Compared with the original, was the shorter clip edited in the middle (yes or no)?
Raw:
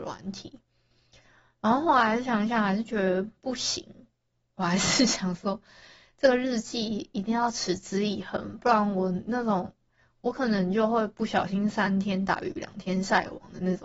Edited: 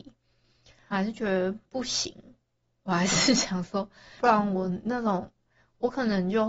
yes